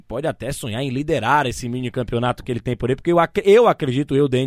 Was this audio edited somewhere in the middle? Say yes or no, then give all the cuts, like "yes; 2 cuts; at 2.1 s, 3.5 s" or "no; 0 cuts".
no; 0 cuts